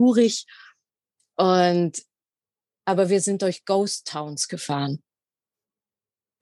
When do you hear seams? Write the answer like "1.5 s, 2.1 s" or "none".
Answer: none